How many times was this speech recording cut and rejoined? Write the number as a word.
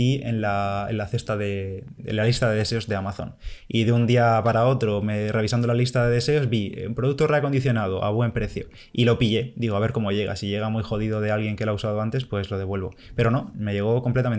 one